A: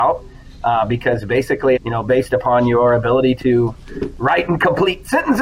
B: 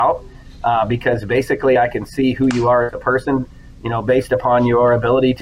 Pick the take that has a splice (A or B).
A